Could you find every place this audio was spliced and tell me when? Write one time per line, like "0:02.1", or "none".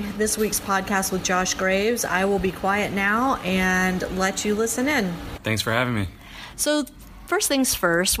0:05.4